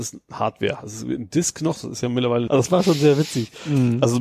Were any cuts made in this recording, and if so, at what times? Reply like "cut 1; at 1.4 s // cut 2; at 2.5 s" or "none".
cut 1; at 2.5 s